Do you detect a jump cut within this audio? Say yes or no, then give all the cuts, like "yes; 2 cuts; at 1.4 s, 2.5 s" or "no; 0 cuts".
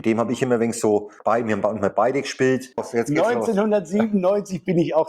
yes; 2 cuts; at 1.2 s, 2.8 s